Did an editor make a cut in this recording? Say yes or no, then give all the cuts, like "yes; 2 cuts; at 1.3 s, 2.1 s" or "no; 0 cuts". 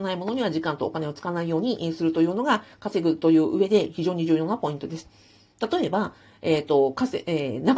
no; 0 cuts